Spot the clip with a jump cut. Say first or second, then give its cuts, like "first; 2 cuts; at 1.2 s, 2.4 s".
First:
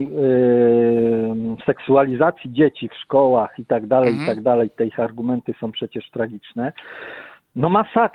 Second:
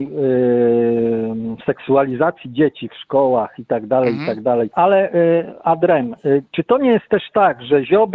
second; 2 cuts; at 4.7 s, 6.5 s